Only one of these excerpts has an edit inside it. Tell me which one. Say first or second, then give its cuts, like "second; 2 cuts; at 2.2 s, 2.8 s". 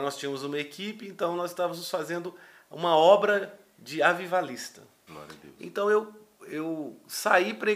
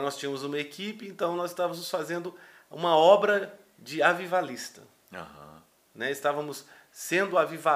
first; 2 cuts; at 5.1 s, 6.4 s